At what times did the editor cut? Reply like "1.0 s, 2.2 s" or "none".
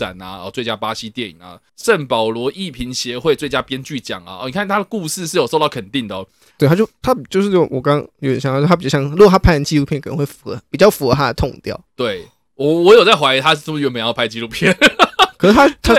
6.6 s